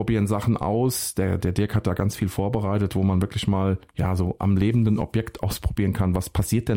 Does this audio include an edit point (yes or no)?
no